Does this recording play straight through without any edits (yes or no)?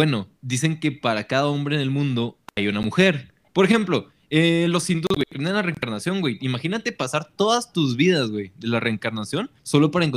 no